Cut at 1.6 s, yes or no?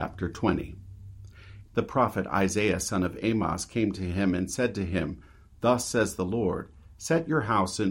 yes